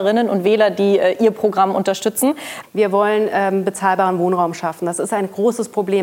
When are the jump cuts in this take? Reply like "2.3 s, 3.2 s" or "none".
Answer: 2.6 s